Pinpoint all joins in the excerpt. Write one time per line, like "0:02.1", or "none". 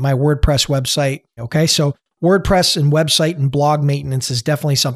0:01.4